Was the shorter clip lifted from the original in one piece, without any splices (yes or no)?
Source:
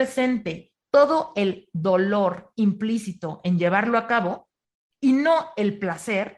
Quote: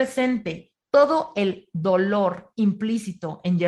yes